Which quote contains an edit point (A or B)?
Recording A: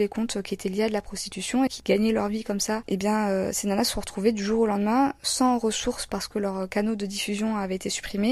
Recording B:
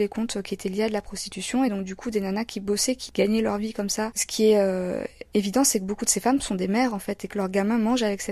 A